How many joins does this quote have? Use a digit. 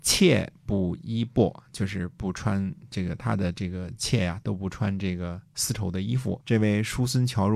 1